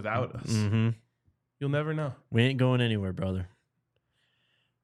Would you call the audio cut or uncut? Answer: uncut